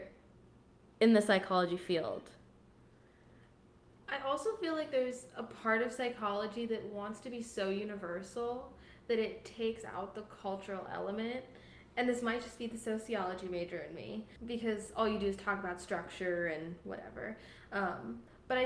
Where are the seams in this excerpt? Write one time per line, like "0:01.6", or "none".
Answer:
0:14.4